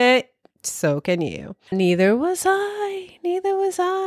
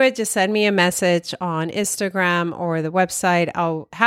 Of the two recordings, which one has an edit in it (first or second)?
first